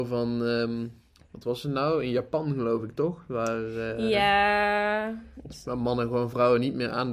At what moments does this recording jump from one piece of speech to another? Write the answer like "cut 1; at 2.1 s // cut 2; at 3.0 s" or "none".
none